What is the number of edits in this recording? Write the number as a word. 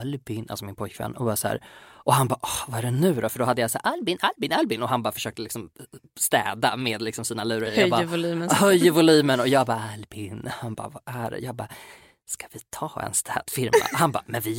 zero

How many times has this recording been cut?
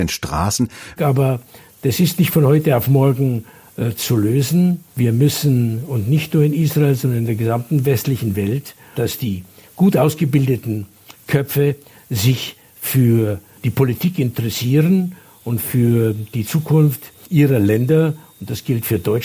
three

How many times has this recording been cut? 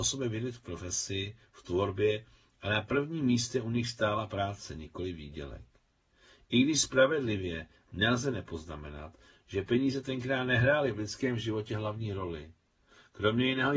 zero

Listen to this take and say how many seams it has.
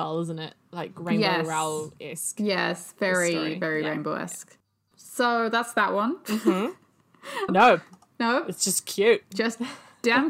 one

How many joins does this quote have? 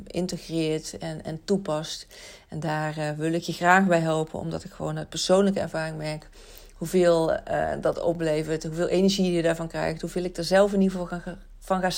zero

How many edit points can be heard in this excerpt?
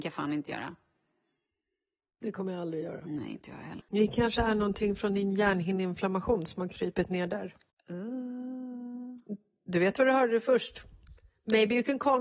one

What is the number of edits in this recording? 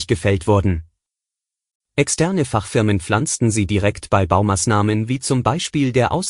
one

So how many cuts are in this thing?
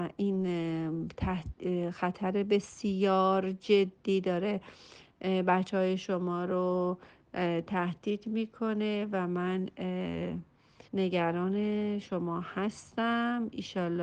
one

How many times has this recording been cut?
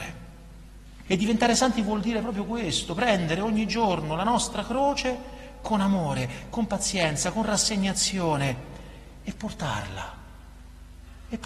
one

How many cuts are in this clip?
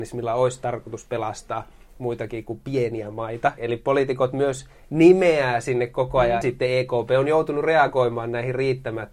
two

